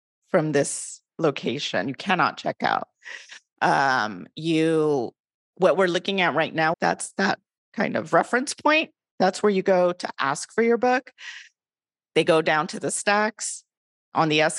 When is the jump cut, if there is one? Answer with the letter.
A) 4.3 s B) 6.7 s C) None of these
B